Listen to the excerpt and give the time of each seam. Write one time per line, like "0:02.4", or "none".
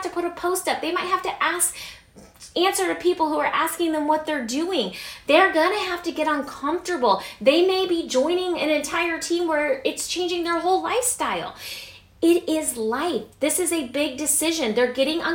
none